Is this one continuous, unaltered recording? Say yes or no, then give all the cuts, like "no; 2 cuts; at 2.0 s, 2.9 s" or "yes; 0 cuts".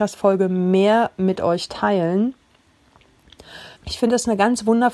no; 1 cut; at 3.8 s